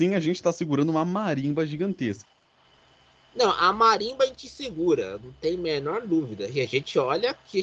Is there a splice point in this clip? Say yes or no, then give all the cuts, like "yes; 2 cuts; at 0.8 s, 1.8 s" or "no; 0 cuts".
no; 0 cuts